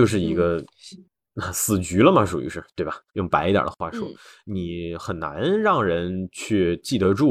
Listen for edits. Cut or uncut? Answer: cut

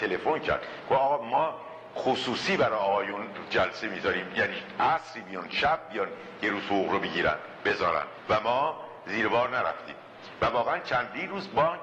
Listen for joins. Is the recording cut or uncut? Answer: cut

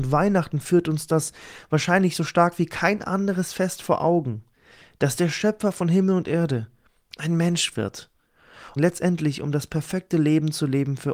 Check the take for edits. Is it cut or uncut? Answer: cut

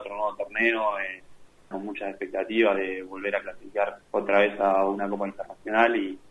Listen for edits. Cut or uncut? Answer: cut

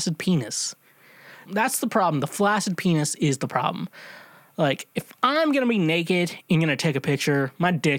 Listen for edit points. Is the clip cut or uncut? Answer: cut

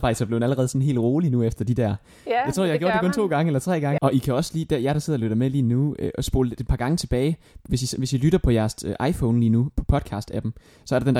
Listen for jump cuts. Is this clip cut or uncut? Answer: cut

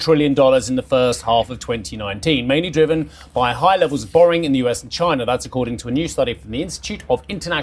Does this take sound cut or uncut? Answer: uncut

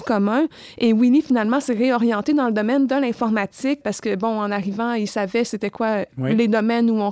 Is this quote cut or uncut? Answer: cut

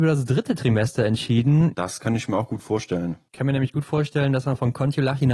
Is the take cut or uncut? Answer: cut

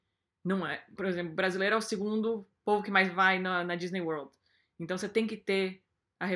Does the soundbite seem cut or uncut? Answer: cut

